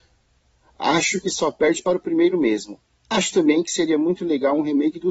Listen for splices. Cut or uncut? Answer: uncut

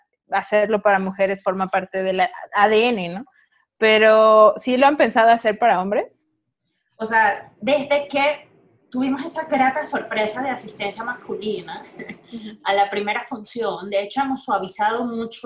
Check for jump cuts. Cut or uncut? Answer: uncut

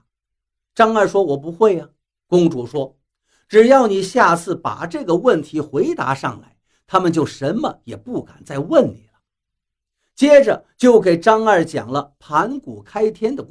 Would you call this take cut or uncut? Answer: uncut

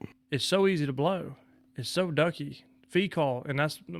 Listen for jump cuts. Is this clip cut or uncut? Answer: uncut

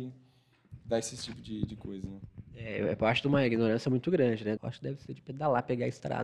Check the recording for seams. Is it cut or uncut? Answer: cut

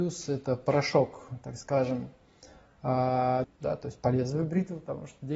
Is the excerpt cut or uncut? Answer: cut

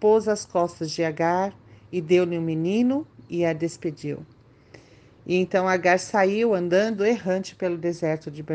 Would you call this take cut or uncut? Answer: uncut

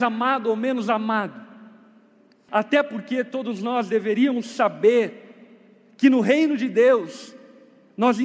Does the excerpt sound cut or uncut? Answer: cut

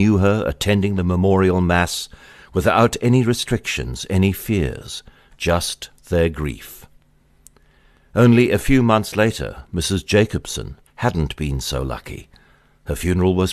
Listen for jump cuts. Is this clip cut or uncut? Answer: cut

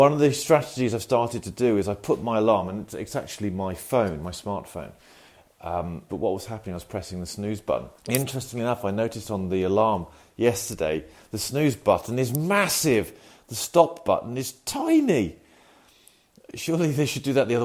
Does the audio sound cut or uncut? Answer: cut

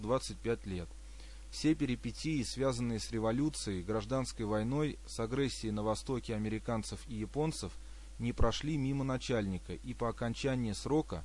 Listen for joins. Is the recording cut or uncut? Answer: uncut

